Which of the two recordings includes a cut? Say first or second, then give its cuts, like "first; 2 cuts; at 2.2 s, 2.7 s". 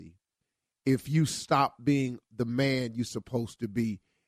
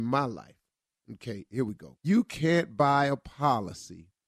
second; 1 cut; at 2.0 s